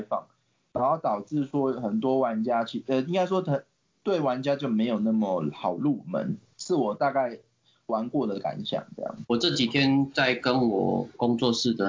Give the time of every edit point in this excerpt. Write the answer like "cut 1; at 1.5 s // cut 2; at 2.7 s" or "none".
cut 1; at 9.2 s